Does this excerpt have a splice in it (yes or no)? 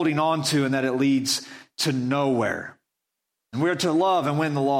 yes